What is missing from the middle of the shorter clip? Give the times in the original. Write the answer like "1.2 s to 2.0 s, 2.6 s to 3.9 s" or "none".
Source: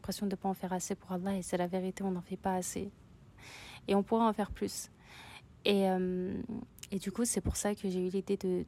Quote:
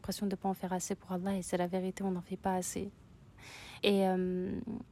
3.8 s to 5.6 s